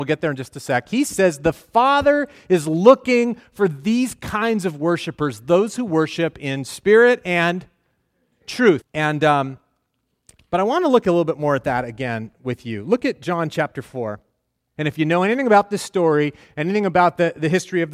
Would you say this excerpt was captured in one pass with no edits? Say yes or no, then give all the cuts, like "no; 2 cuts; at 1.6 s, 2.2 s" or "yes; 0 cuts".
no; 2 cuts; at 8.8 s, 14.8 s